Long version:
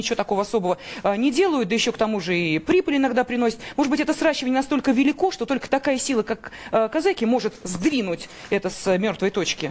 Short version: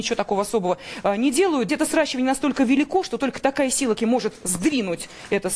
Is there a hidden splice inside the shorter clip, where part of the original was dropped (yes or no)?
yes